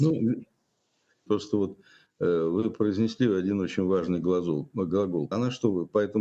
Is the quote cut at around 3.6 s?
no; 2 cuts; at 1.3 s, 5.3 s

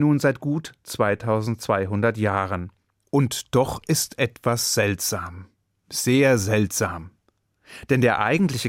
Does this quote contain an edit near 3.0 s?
yes; 1 cut; at 3.0 s

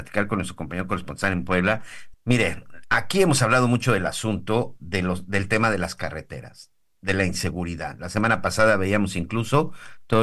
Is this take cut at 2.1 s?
yes; 1 cut; at 2.1 s

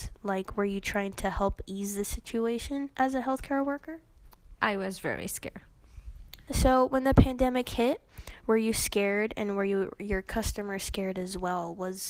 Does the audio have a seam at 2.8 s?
no; 2 cuts; at 4.6 s, 6.5 s

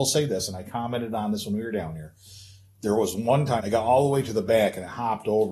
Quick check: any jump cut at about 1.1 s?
no; 1 cut; at 3.6 s

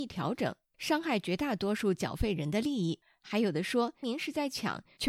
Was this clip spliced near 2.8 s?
no; 1 cut; at 4.0 s

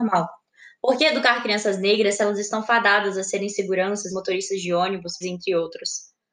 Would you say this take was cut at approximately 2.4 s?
no; 2 cuts; at 4.1 s, 5.2 s

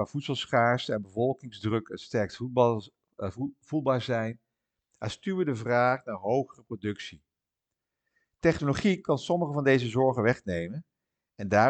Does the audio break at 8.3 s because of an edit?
no; 0 cuts

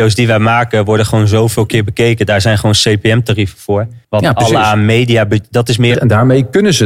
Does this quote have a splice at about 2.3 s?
no; 2 cuts; at 4.0 s, 5.9 s

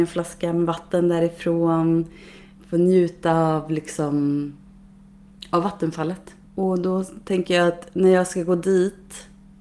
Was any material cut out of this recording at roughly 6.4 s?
yes; 1 cut; at 6.4 s

